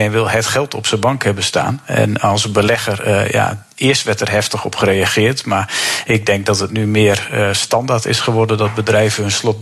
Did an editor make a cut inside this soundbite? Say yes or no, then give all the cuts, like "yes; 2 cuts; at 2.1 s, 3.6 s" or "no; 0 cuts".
no; 0 cuts